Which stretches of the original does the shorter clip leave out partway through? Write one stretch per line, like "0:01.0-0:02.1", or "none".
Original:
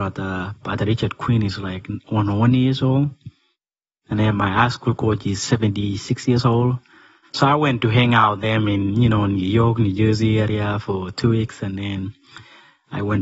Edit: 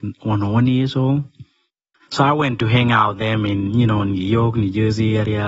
0:03.8-0:07.2